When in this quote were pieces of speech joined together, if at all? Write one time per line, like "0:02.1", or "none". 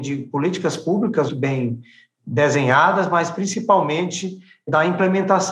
0:01.3

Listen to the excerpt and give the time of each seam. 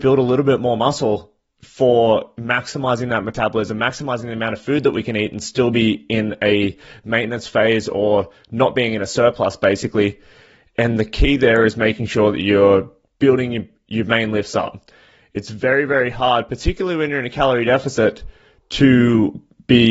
none

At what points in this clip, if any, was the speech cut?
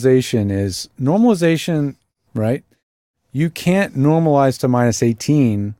0:02.3

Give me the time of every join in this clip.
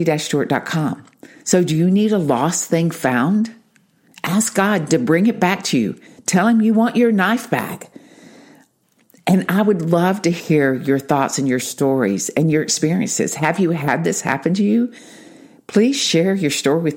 0:01.4

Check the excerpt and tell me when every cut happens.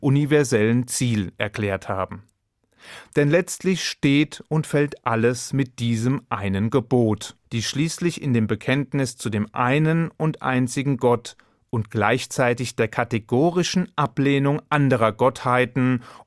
0:07.4

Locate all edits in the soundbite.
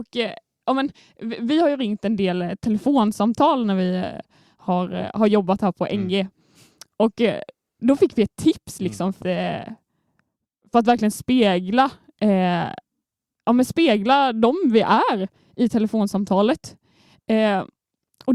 0:09.2

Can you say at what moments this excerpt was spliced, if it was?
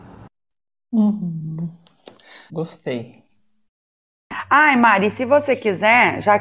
0:02.5

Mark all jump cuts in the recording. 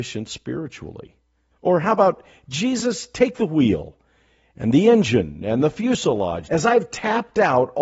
0:01.5
0:06.4

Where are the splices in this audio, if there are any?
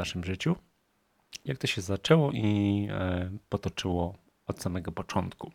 0:01.5

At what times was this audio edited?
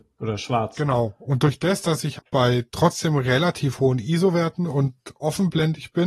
0:02.2

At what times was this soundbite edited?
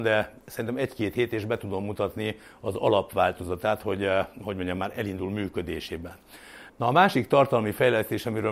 0:06.7

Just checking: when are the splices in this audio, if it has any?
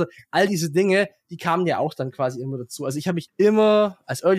0:03.3

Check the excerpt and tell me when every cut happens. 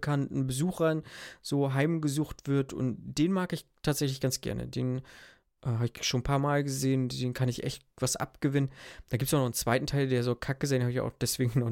none

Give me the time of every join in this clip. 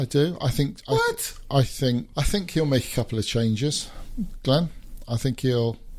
0:02.1

